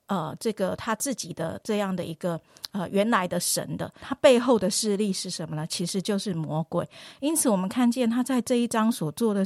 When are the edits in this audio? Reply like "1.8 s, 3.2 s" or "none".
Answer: 4.0 s